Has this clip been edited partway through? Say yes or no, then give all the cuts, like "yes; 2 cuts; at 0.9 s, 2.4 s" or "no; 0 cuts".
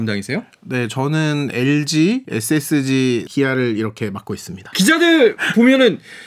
yes; 2 cuts; at 3.3 s, 4.7 s